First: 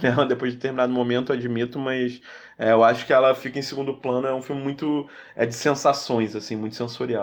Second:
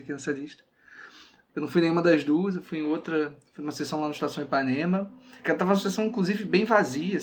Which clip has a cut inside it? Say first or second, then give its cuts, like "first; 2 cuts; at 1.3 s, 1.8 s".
second; 1 cut; at 1.5 s